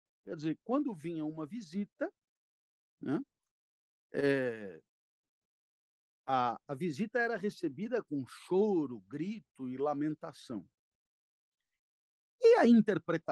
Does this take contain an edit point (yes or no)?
no